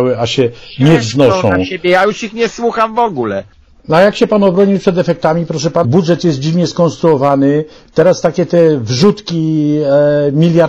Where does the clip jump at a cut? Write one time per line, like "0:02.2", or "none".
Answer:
0:05.8
0:07.8

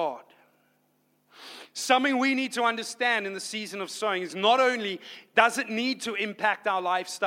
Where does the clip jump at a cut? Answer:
none

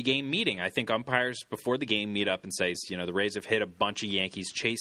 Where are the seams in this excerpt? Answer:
0:02.7

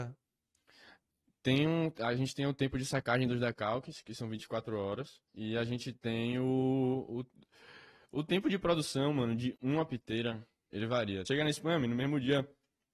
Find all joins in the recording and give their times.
0:05.3
0:11.2

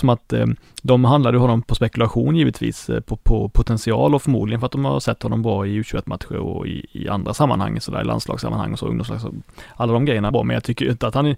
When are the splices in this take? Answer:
0:01.6
0:10.3

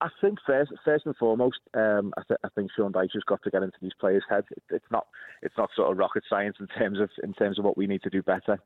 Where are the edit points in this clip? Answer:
0:04.4

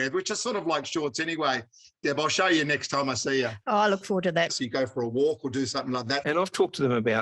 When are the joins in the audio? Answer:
0:04.5
0:06.2

